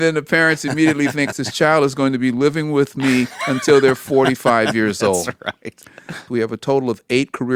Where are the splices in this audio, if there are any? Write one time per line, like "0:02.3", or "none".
0:01.3
0:06.3